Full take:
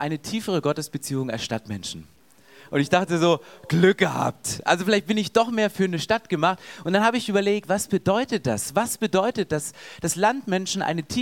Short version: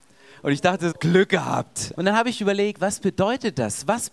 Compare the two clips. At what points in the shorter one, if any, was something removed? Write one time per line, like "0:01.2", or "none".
0:00.9
0:02.0